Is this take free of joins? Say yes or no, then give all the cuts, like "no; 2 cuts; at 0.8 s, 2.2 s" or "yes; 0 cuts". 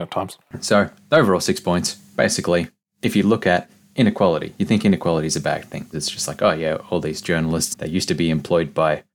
no; 2 cuts; at 5.9 s, 7.7 s